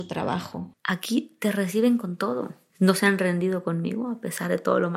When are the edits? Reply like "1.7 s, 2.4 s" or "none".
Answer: 2.7 s